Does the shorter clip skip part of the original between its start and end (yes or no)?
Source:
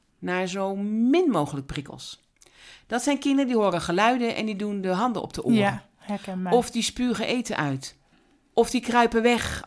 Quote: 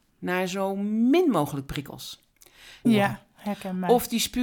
yes